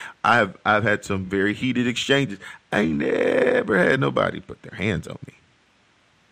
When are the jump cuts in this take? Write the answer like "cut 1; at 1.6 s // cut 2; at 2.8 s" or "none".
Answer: none